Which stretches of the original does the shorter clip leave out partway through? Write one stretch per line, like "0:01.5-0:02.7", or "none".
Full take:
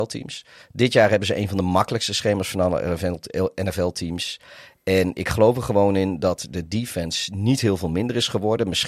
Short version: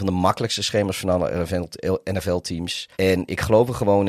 0:04.4-0:04.8